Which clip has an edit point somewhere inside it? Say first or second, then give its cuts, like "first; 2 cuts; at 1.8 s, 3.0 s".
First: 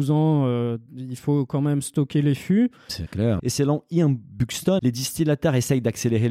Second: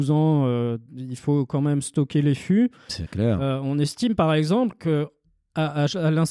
first; 2 cuts; at 3.4 s, 4.8 s